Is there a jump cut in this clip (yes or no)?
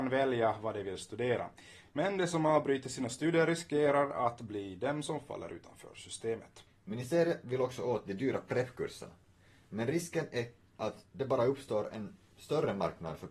no